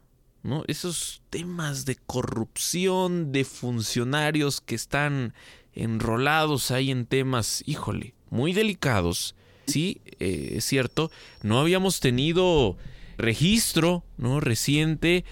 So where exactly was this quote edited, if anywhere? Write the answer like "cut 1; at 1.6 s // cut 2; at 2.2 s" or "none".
cut 1; at 9.7 s // cut 2; at 13.2 s